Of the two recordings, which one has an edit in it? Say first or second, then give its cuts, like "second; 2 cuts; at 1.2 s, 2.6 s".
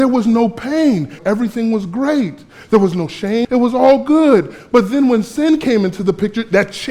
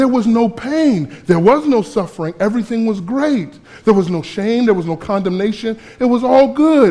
first; 2 cuts; at 1.2 s, 3.4 s